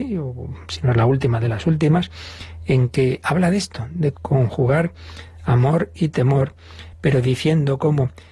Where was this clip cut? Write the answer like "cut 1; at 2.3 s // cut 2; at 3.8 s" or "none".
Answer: cut 1; at 4.1 s